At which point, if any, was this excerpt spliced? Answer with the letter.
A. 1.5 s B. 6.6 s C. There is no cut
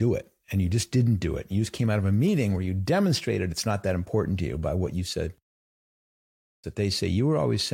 B